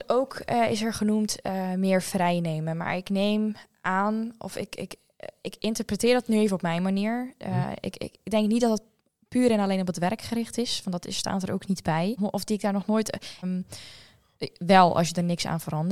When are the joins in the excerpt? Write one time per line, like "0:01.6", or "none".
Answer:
0:12.2
0:13.4